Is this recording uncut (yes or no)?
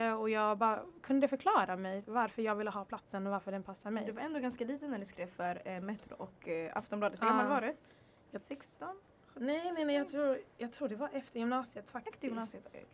yes